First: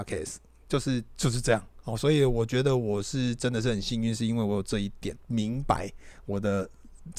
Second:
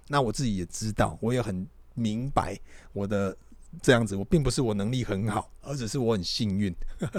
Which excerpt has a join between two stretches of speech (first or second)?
first